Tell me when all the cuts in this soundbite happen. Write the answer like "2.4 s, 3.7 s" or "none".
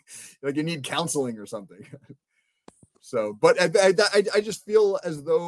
none